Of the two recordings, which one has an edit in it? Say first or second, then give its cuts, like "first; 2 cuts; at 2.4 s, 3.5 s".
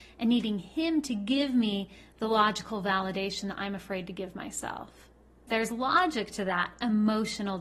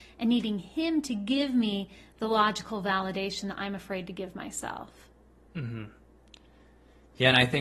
first; 1 cut; at 5.5 s